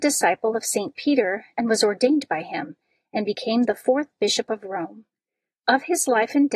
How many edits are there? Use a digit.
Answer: 0